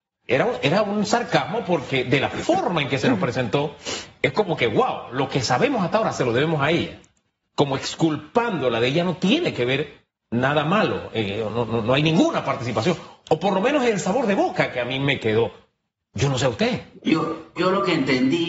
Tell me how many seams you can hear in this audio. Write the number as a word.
one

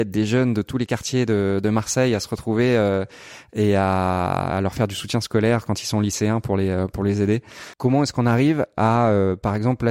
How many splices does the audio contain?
one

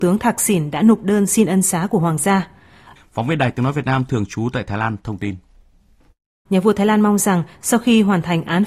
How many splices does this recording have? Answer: two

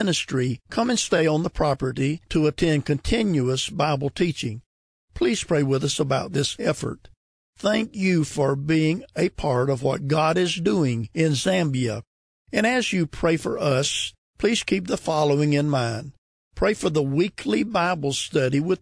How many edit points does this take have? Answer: one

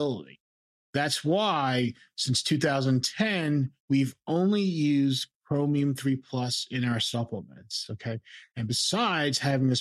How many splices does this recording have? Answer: zero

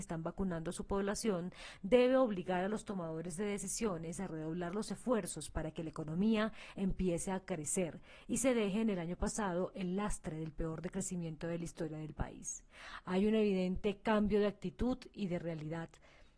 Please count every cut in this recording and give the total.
zero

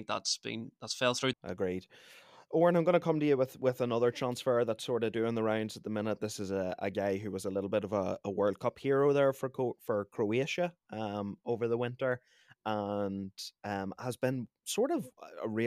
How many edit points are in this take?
one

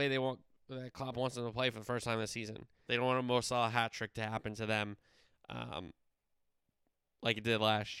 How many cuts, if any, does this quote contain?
one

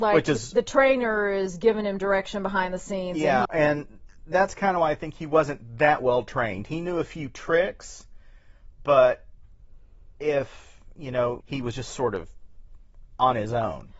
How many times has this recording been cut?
two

